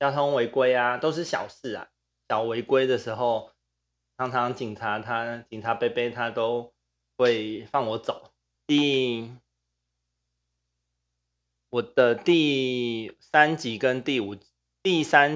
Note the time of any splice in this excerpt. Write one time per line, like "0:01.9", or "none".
0:08.6